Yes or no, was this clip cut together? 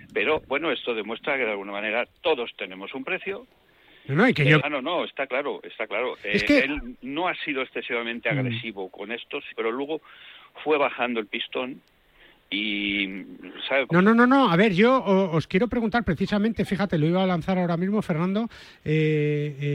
yes